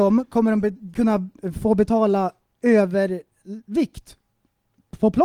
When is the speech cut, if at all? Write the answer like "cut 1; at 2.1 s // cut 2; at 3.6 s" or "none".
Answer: none